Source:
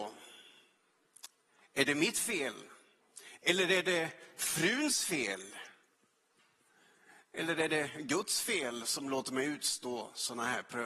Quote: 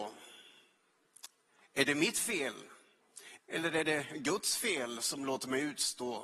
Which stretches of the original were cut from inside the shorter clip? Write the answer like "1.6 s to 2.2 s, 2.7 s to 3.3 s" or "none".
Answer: 3.4 s to 7.2 s